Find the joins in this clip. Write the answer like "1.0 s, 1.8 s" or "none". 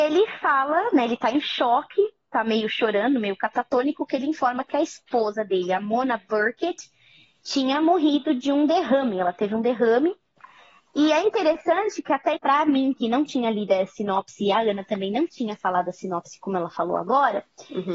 12.4 s